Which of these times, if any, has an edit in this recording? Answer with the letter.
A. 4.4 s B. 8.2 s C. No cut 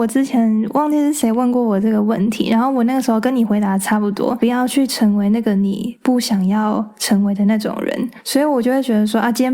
C